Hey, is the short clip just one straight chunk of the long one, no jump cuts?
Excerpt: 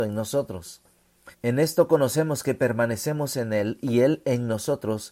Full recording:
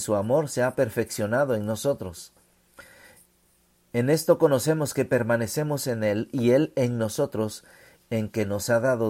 no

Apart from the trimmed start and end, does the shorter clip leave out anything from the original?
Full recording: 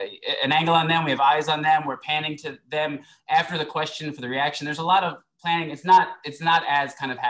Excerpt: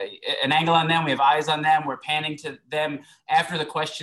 no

